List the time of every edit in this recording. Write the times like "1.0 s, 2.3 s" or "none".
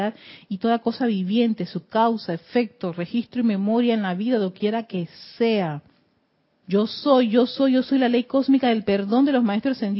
6.6 s